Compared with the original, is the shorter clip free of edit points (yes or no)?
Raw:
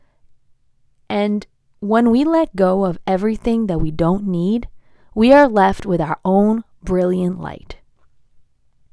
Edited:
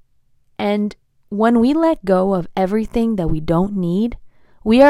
yes